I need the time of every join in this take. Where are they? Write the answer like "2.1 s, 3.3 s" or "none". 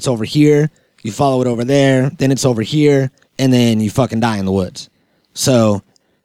3.2 s